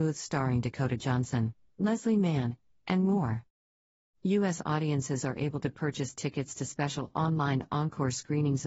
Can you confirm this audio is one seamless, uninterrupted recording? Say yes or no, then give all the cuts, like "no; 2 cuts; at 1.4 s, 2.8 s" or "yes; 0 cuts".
no; 1 cut; at 2.7 s